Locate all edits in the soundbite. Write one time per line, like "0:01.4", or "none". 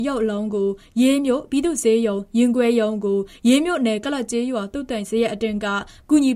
none